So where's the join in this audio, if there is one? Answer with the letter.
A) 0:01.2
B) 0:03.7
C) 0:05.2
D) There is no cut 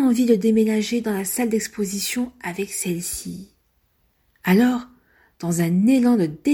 D